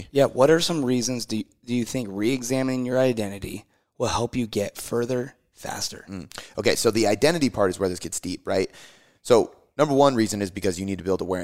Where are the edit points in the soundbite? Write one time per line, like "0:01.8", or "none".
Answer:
none